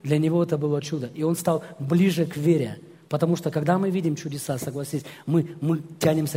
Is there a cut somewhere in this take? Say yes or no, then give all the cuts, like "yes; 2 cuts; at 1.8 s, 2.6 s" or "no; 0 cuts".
no; 0 cuts